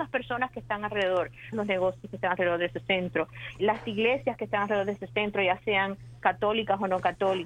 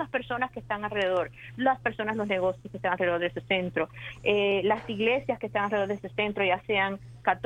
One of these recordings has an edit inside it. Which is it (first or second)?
first